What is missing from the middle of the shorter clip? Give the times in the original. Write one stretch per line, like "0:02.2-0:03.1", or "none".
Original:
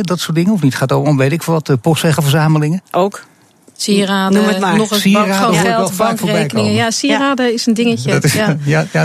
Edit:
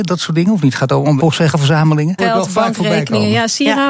0:01.2-0:01.8
0:02.8-0:05.6